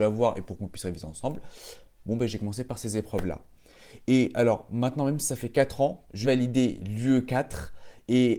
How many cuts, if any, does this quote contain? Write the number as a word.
one